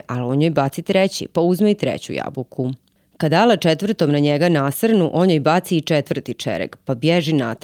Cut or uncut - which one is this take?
uncut